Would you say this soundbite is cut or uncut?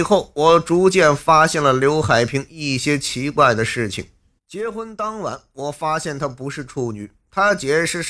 cut